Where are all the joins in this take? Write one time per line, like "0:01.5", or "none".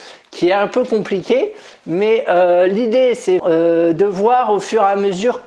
0:03.4